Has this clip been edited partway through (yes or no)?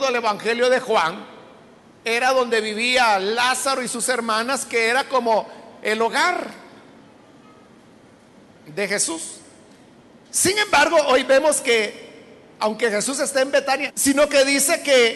yes